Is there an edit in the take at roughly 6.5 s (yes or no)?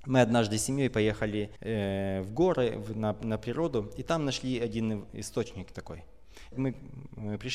yes